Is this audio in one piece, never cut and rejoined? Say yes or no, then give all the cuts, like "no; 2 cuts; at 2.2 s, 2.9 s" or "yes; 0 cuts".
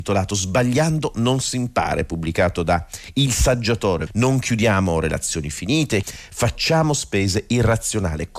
no; 2 cuts; at 4.1 s, 6.0 s